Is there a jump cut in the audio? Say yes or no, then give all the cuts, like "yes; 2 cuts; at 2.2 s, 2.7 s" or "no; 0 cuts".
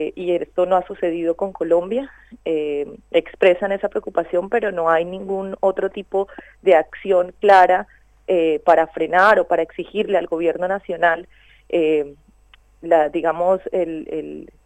yes; 1 cut; at 11.5 s